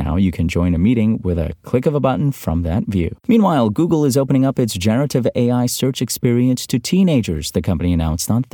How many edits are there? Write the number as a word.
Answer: one